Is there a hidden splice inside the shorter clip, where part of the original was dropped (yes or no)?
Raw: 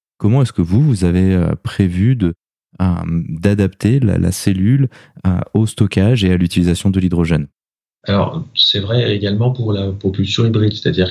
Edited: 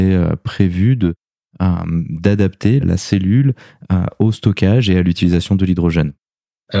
yes